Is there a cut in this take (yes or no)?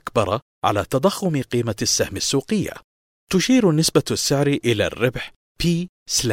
yes